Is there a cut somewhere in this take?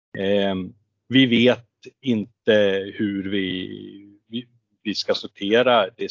no; 0 cuts

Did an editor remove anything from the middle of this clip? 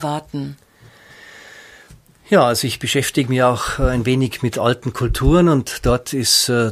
no; 0 cuts

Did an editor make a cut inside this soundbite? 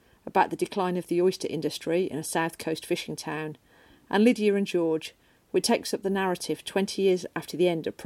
no; 0 cuts

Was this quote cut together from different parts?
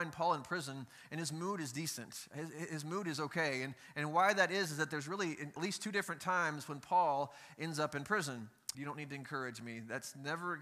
yes; 2 cuts; at 5.6 s, 8.7 s

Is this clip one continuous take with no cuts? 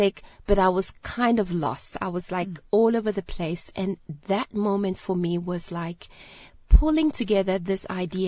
yes; 0 cuts

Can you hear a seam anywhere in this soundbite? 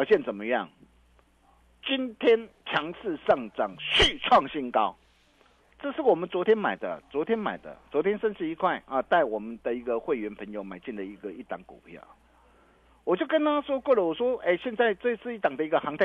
no; 0 cuts

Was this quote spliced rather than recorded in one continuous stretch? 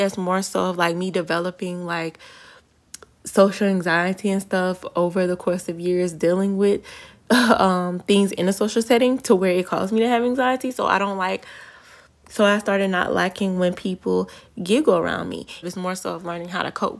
yes; 1 cut; at 15.6 s

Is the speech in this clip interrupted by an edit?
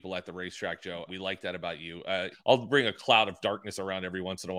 yes; 2 cuts; at 1.1 s, 2.3 s

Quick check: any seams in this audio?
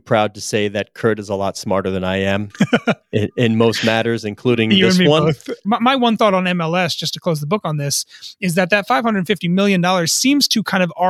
yes; 1 cut; at 5.6 s

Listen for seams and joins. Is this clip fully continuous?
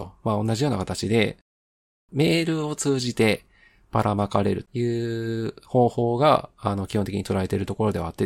no; 1 cut; at 4.6 s

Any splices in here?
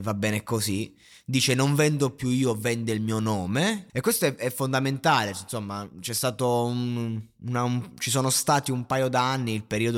yes; 1 cut; at 3.9 s

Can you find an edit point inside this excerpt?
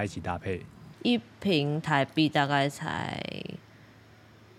yes; 1 cut; at 0.9 s

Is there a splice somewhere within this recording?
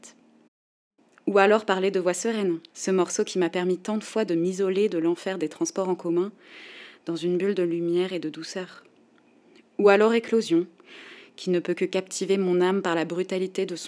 no; 0 cuts

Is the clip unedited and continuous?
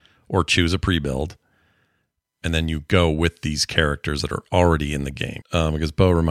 no; 1 cut; at 5.4 s

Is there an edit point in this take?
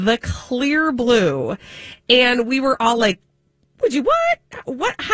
no; 0 cuts

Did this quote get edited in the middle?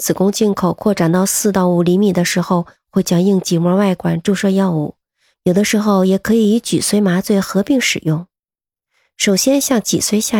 yes; 2 cuts; at 2.7 s, 5.3 s

